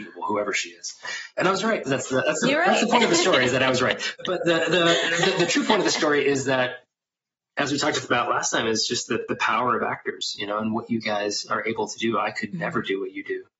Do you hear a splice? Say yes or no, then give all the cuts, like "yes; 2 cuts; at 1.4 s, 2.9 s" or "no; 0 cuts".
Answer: no; 0 cuts